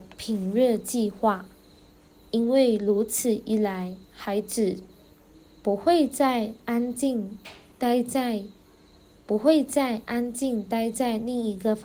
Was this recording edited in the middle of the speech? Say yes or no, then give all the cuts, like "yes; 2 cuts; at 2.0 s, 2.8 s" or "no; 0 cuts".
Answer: no; 0 cuts